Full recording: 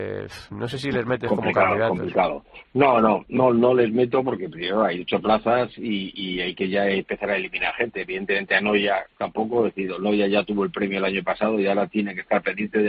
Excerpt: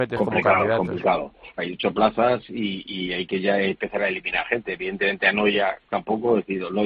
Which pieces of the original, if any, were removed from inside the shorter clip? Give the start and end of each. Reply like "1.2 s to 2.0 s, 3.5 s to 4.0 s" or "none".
2.7 s to 4.9 s